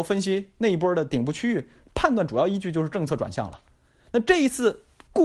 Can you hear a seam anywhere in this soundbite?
no; 0 cuts

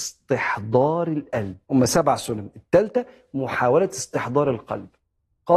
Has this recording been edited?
yes; 1 cut; at 1.6 s

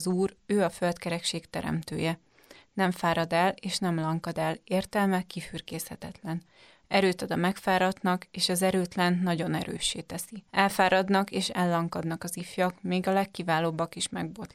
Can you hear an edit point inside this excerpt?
yes; 1 cut; at 10.5 s

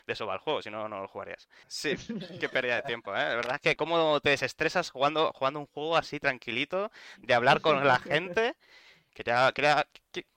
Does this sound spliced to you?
yes; 3 cuts; at 1.6 s, 3.8 s, 9.1 s

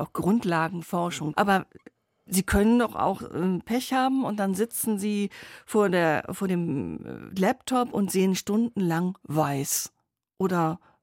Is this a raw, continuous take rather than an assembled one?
no; 1 cut; at 1.3 s

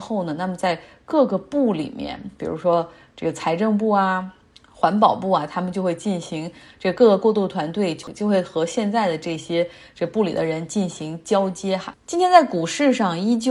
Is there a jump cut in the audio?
yes; 1 cut; at 11.9 s

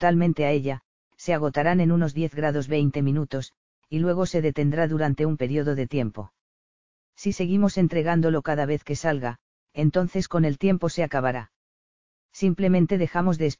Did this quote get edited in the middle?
no; 0 cuts

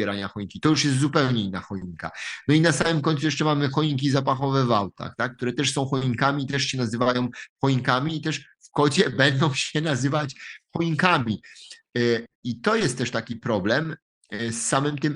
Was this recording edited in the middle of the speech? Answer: no; 0 cuts

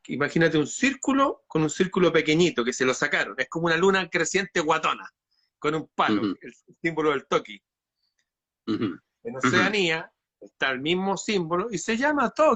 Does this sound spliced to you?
no; 0 cuts

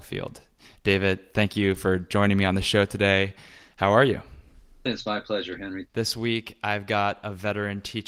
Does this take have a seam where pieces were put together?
yes; 2 cuts; at 4.9 s, 5.9 s

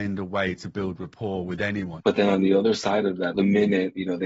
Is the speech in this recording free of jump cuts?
no; 2 cuts; at 2.0 s, 3.3 s

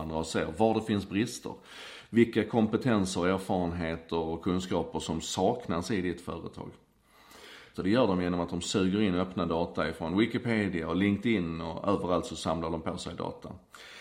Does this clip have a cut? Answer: yes; 1 cut; at 7.7 s

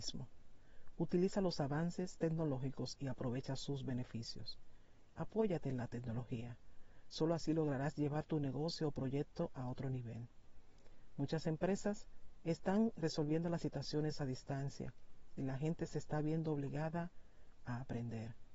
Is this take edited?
no; 0 cuts

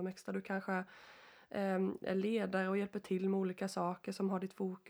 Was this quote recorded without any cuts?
yes; 0 cuts

